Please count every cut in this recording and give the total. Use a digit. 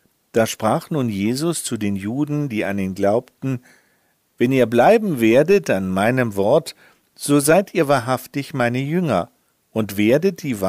0